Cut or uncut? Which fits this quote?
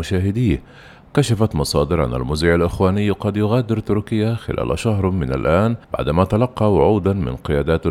cut